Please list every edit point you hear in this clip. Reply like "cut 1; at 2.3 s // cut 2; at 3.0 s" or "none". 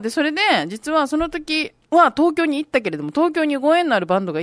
cut 1; at 1.8 s

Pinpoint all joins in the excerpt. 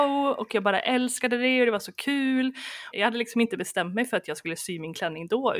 cut 1; at 2.9 s

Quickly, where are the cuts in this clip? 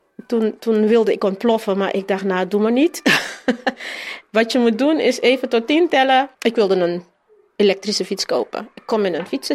cut 1; at 6.3 s

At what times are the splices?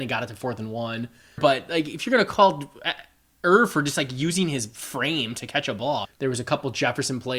cut 1; at 1.4 s // cut 2; at 6.0 s

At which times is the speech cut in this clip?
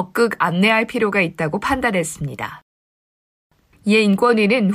cut 1; at 3.7 s

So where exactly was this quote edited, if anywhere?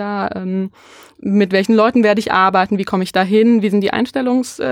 none

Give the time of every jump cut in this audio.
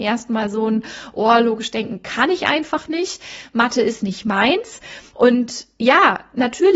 cut 1; at 5.1 s

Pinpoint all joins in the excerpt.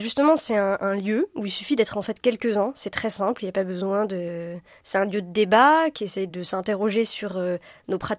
cut 1; at 4.8 s

